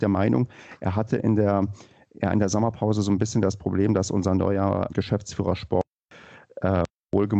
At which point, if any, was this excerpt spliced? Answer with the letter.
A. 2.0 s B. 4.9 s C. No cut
B